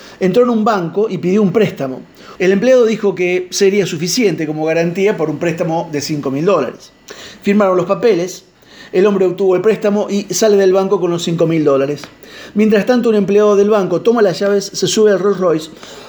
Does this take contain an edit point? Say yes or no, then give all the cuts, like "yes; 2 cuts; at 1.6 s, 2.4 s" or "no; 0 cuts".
yes; 1 cut; at 2.4 s